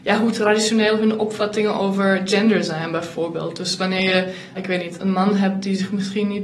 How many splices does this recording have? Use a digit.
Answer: 1